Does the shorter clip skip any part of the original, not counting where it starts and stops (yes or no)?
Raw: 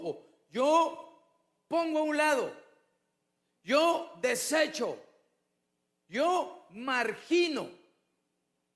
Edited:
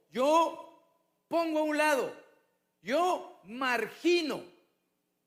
yes